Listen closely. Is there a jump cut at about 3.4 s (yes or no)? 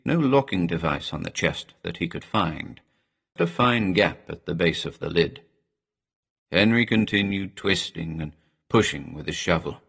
yes